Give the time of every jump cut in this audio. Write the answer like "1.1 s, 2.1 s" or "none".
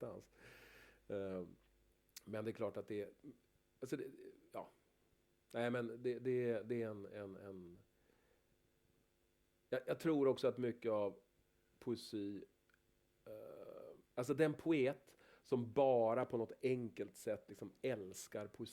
14.0 s